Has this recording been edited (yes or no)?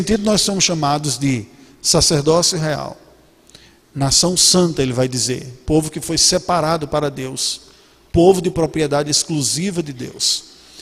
no